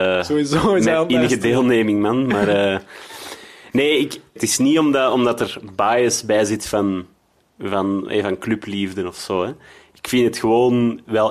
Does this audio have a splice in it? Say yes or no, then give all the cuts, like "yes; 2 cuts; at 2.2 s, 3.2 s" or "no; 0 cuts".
yes; 1 cut; at 4.4 s